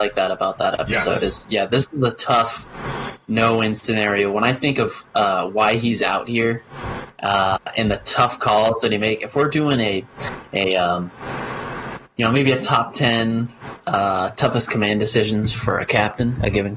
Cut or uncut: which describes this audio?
uncut